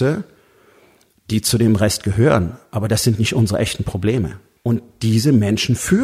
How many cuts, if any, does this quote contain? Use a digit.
1